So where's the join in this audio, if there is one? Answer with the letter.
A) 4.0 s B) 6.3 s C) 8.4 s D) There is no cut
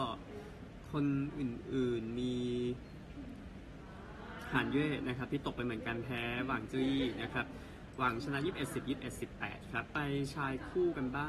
D